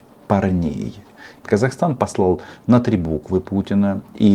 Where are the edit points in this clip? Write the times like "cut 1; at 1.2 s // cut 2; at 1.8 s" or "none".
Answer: cut 1; at 1.4 s